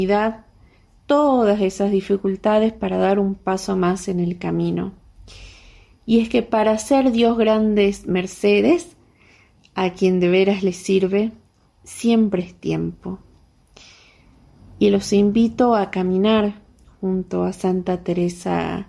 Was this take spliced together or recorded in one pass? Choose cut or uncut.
uncut